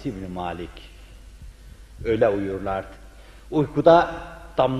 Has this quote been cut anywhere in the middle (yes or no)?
yes